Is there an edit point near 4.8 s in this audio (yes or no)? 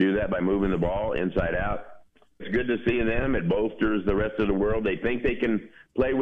no